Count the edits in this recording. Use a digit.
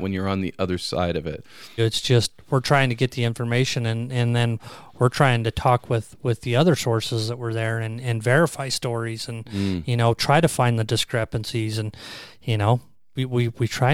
1